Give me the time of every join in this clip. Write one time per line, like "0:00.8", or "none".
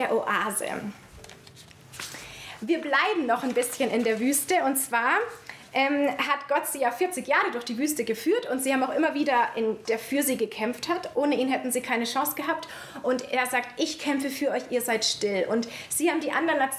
0:09.9